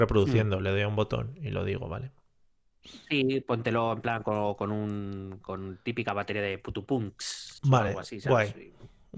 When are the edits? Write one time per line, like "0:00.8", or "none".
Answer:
none